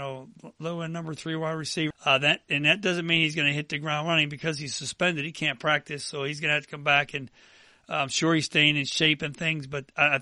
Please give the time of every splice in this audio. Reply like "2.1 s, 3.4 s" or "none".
1.9 s